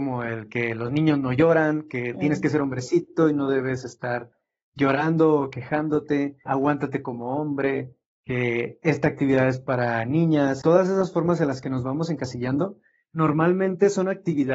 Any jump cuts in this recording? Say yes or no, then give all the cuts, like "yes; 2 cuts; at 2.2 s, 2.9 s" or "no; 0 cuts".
yes; 2 cuts; at 6.5 s, 10.6 s